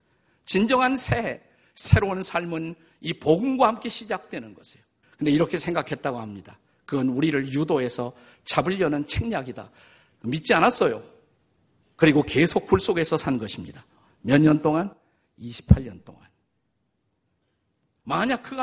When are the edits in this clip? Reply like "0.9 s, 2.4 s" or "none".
5.0 s